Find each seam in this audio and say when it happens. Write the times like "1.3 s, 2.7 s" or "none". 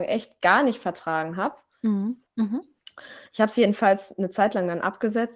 2.3 s